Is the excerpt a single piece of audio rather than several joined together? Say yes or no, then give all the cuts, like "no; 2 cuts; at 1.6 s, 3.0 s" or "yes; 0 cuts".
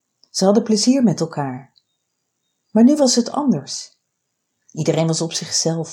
yes; 0 cuts